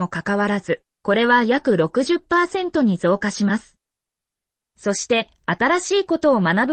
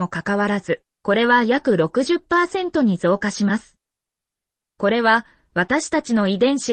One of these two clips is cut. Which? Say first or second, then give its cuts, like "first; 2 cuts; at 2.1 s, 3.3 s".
first; 1 cut; at 4.7 s